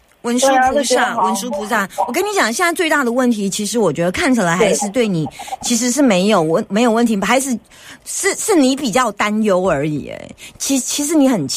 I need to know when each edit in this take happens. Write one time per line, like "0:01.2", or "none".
none